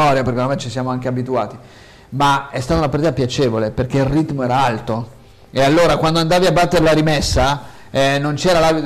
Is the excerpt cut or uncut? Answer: uncut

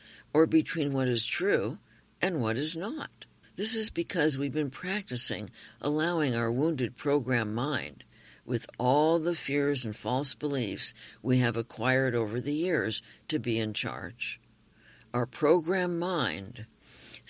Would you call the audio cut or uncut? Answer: cut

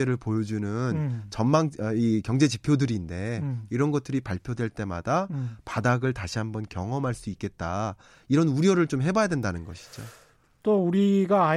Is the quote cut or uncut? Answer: uncut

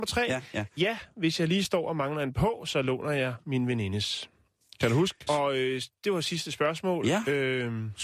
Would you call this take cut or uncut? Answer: cut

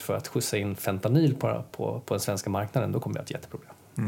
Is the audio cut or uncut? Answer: uncut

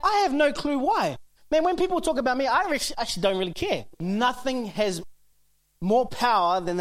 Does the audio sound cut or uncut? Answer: cut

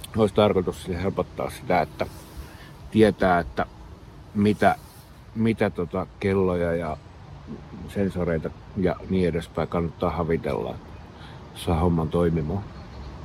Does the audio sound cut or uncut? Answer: uncut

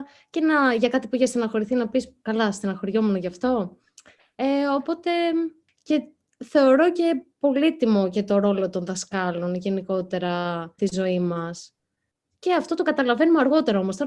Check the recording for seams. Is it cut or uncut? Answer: uncut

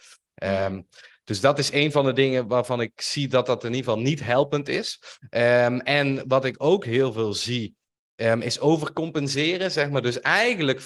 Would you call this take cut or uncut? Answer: uncut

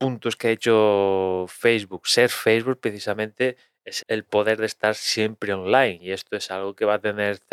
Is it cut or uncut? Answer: cut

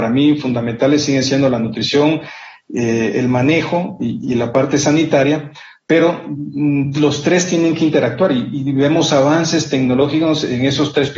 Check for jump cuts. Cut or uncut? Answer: uncut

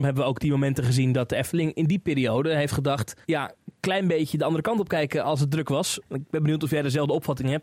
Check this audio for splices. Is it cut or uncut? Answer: cut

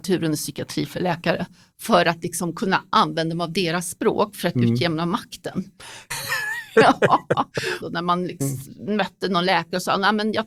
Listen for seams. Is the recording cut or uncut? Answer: cut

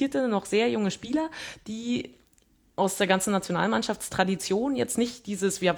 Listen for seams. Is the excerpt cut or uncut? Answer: uncut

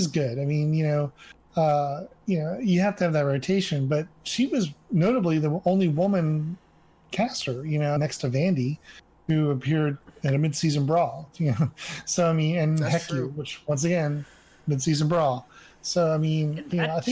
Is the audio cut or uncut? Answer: cut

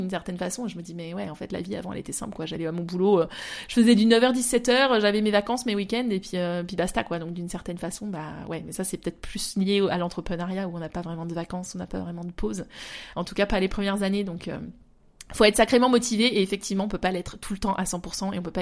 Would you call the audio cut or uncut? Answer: uncut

